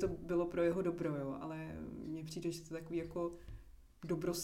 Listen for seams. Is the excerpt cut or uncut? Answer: uncut